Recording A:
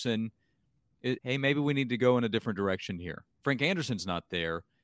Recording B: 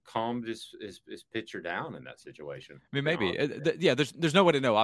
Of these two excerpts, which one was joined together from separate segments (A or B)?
A